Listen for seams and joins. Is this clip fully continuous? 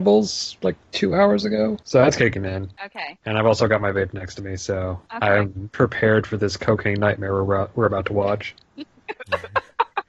yes; 0 cuts

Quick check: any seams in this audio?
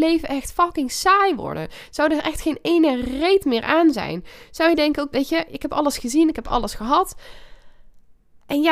yes; 1 cut; at 5.1 s

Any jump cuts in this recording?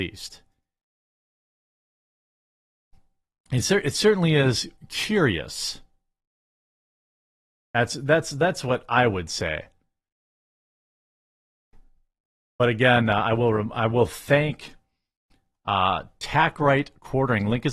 no; 0 cuts

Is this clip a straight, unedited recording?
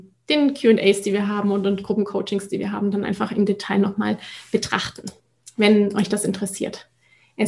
yes; 0 cuts

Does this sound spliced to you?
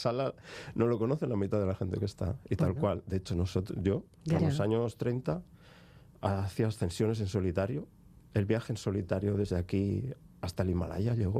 yes; 1 cut; at 4.4 s

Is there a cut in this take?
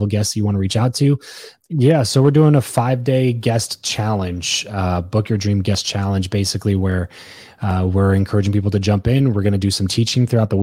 yes; 1 cut; at 1.6 s

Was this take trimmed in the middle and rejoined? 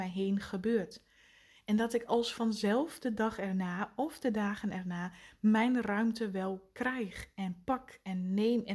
no; 0 cuts

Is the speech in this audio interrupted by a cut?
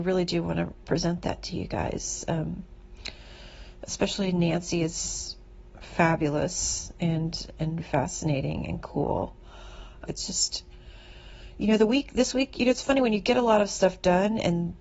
yes; 2 cuts; at 7.8 s, 10.1 s

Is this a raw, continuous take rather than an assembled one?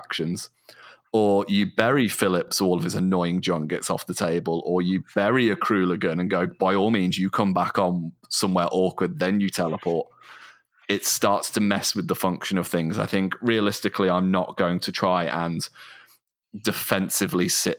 yes; 0 cuts

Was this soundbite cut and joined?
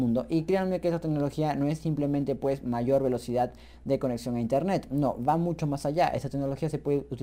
no; 0 cuts

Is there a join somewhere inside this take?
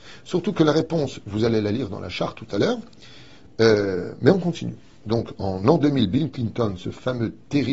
no; 0 cuts

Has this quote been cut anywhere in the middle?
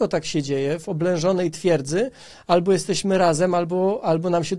no; 0 cuts

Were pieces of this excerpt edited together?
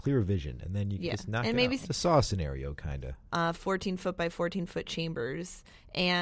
yes; 2 cuts; at 1.8 s, 3.3 s

